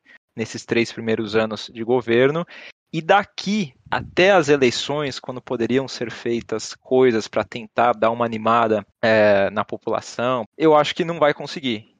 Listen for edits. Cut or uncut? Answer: cut